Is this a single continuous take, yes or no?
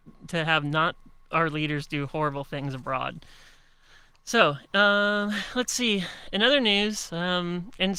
yes